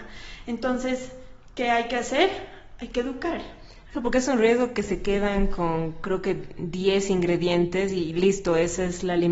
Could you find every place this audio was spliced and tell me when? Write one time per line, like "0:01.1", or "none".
none